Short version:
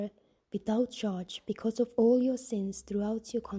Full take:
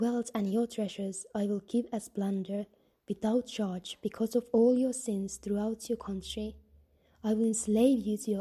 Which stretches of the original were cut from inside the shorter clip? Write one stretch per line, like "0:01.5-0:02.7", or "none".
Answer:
none

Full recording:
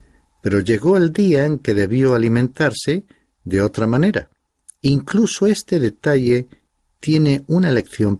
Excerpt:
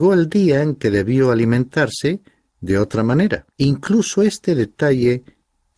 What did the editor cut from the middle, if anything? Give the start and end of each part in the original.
0:04.4-0:04.8

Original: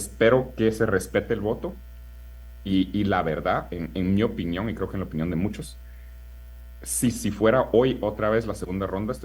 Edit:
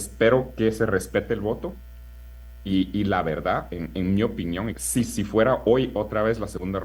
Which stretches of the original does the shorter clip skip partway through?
0:04.7-0:06.8

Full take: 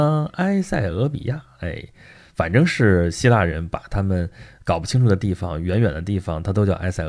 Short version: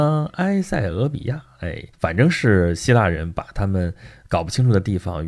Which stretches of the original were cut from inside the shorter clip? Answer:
0:01.9-0:02.3

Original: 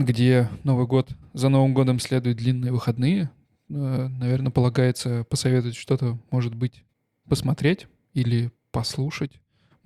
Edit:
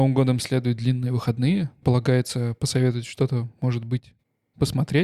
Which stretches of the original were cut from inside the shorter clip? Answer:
0:03.4-0:04.5

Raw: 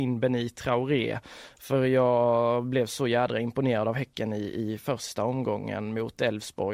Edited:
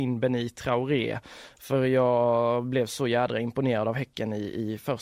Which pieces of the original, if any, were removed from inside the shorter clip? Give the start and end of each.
none

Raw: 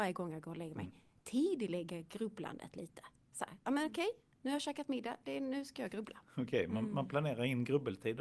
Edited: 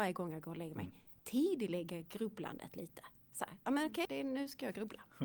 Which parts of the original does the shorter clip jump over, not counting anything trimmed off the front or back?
0:04.1-0:05.2

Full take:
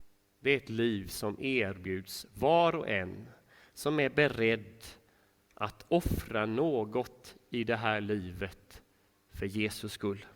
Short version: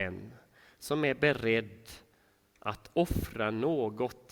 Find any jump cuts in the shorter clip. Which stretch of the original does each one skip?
none

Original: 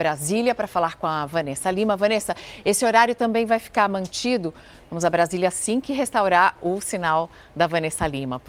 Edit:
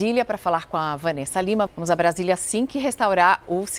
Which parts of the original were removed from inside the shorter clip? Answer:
0:02.0-0:04.8

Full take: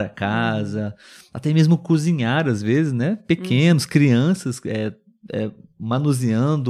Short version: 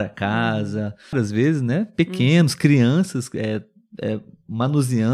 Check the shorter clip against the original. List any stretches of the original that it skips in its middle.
0:01.1-0:02.4

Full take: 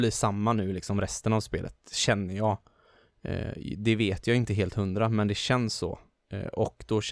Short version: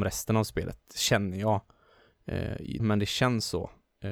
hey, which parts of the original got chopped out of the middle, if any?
0:03.8-0:05.1

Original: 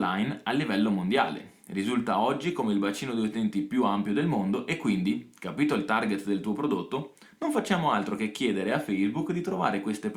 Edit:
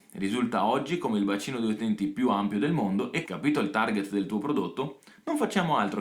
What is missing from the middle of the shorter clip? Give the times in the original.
0:04.8-0:05.4

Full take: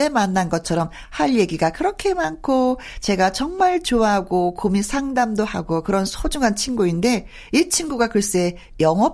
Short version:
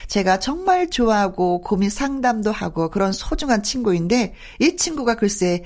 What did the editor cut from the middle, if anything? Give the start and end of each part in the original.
none

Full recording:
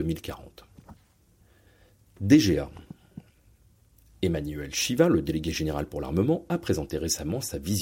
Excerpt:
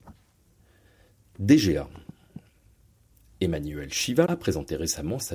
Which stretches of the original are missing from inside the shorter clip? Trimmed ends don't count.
0:05.1-0:06.5

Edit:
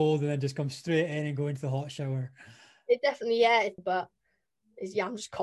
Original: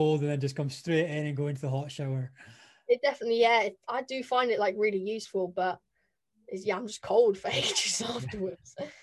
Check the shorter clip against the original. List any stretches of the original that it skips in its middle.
0:03.8-0:05.5

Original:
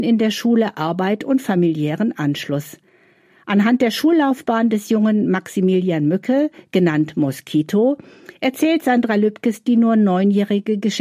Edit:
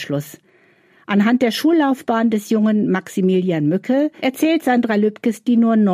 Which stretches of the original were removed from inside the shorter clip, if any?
0:06.6-0:08.4

